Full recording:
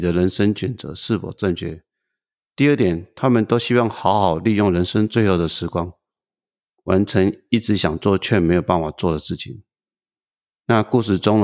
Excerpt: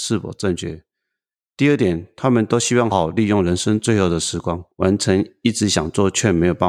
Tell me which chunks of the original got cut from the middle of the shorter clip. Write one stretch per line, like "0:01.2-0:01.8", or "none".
0:03.9-0:04.2
0:06.0-0:06.8